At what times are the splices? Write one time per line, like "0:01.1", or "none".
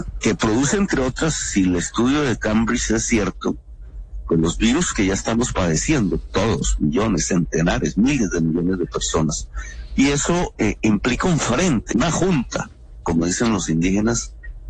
0:11.9
0:13.0